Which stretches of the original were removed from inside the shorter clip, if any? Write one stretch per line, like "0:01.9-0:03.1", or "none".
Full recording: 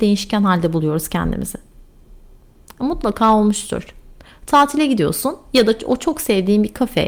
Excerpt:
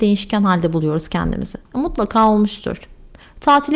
0:01.7-0:02.7